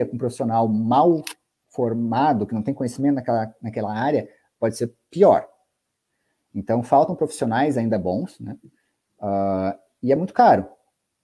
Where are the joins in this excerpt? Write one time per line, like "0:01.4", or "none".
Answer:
none